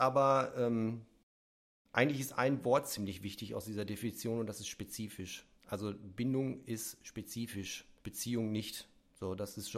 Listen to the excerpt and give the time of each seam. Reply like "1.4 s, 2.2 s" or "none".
5.5 s, 8.0 s